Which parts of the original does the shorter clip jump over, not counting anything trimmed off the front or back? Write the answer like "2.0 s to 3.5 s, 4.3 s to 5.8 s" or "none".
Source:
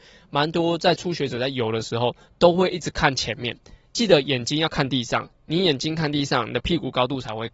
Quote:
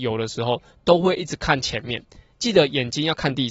none